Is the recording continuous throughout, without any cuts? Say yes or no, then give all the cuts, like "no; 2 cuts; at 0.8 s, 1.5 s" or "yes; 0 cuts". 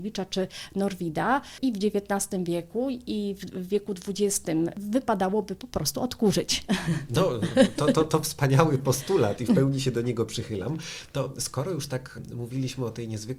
no; 1 cut; at 7.8 s